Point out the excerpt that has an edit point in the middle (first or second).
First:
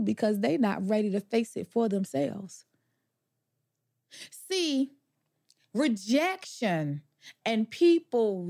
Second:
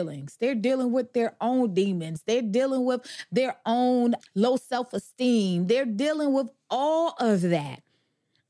second